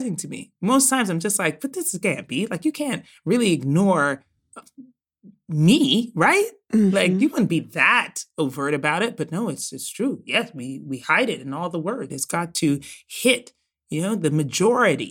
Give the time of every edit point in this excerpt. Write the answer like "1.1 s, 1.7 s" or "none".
12.1 s